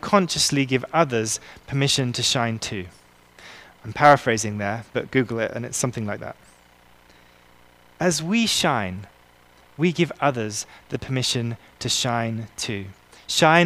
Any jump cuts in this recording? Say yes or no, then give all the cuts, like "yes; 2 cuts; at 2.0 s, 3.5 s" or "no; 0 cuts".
no; 0 cuts